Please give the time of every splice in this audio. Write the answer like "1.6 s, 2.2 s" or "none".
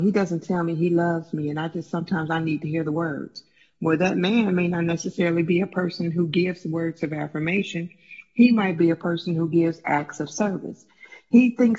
none

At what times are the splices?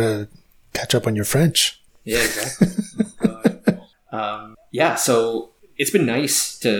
none

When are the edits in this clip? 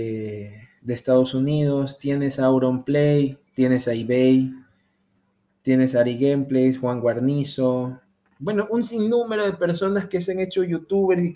3.5 s

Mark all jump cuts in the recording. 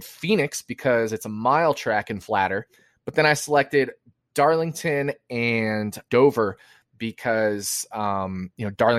6.0 s

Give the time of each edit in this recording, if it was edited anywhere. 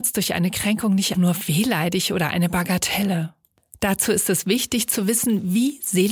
1.1 s

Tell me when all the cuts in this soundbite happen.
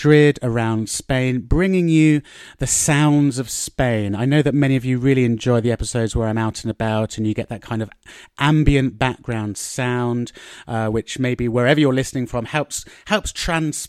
none

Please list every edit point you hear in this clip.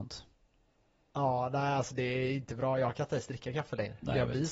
none

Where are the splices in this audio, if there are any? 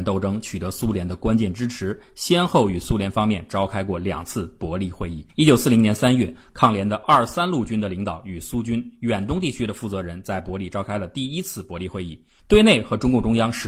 5.3 s, 12.4 s

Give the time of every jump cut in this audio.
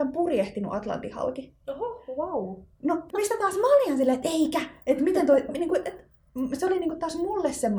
3.1 s

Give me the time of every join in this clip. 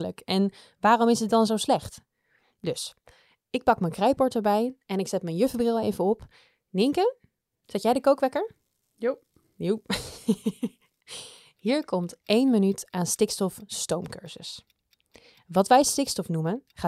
none

